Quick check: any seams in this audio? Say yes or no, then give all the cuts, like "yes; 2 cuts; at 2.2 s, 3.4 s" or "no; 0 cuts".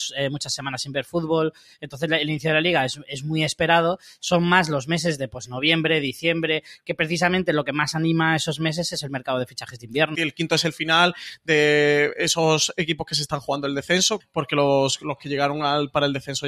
yes; 2 cuts; at 10.1 s, 14.2 s